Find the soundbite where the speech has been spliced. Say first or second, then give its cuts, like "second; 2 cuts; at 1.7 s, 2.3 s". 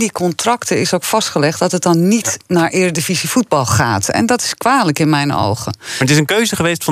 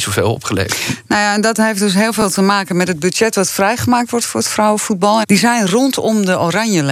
second; 1 cut; at 5.2 s